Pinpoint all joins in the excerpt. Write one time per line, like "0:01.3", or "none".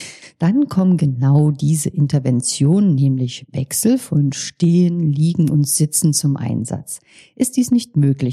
none